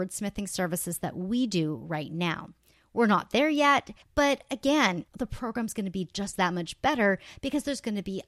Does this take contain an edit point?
yes; 2 cuts; at 4.0 s, 5.1 s

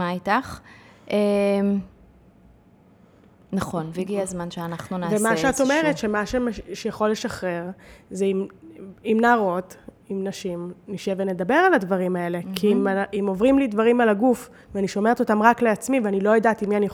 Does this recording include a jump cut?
no; 0 cuts

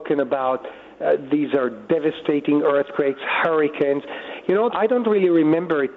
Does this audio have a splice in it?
yes; 1 cut; at 4.7 s

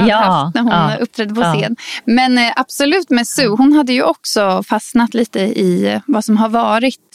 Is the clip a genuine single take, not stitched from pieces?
yes; 0 cuts

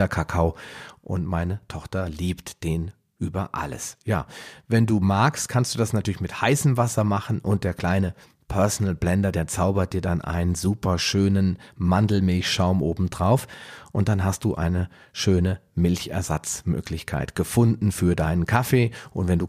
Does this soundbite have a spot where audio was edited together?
no; 0 cuts

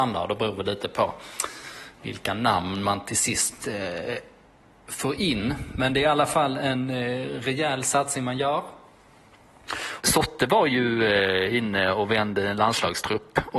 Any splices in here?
yes; 1 cut; at 10.0 s

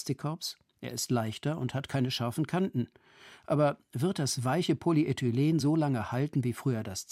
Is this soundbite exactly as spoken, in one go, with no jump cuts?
yes; 0 cuts

